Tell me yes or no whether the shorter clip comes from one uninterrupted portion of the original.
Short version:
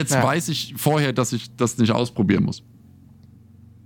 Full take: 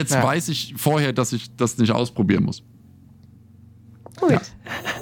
yes